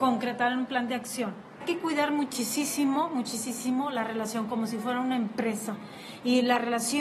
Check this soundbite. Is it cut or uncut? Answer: cut